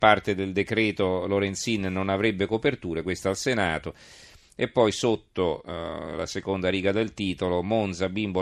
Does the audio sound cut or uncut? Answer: uncut